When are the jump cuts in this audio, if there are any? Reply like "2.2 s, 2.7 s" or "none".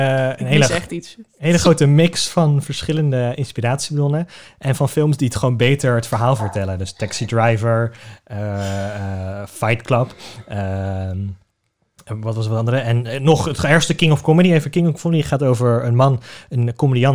none